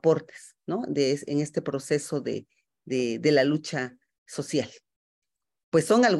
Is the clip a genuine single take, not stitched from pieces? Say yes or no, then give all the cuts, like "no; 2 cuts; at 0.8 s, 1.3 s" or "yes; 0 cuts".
yes; 0 cuts